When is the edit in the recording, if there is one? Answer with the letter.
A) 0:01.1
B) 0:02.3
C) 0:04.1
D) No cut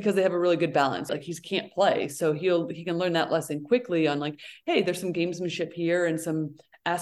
A